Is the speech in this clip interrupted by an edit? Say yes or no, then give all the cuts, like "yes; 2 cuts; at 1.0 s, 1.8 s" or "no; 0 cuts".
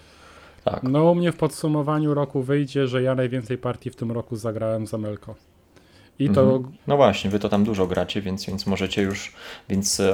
yes; 1 cut; at 6.8 s